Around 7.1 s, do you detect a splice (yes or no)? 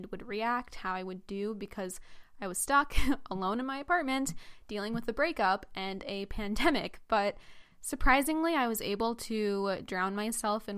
no